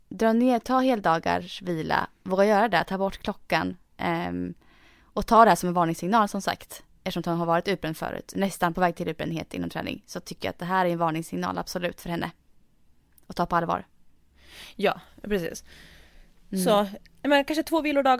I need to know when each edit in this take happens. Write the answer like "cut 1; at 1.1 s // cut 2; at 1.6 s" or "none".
cut 1; at 8.3 s